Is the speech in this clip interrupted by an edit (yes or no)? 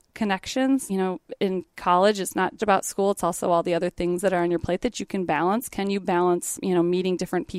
yes